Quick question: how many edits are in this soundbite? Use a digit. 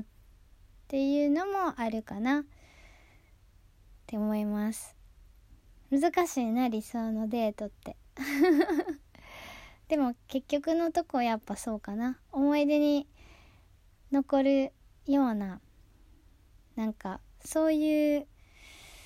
0